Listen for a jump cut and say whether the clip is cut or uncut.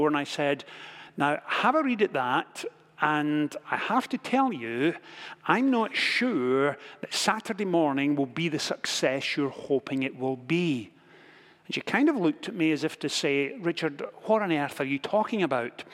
uncut